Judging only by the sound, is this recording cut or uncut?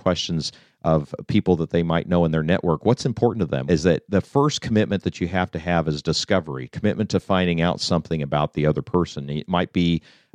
cut